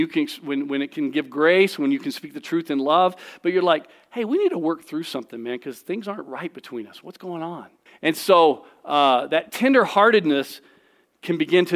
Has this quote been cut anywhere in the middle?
yes; 1 cut; at 7.9 s

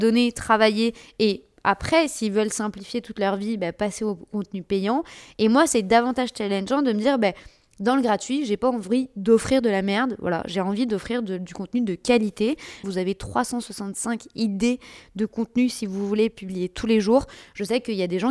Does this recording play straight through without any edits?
no; 1 cut; at 12.8 s

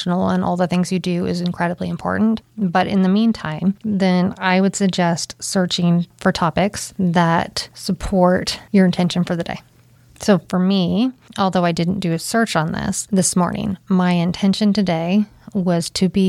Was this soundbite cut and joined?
yes; 1 cut; at 3.8 s

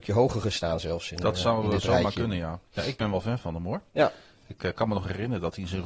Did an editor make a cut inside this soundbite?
yes; 1 cut; at 2.7 s

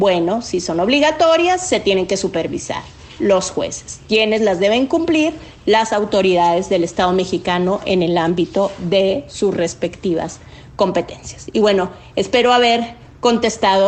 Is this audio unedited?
no; 1 cut; at 3.2 s

